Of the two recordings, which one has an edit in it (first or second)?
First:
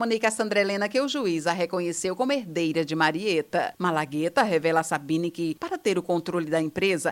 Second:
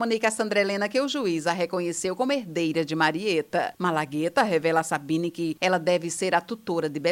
second